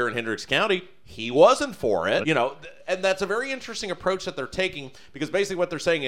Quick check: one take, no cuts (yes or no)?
no